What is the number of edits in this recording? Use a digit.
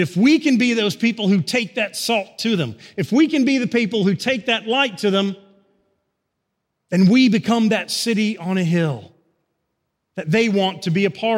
0